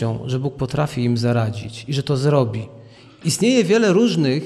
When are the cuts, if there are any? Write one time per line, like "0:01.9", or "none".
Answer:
none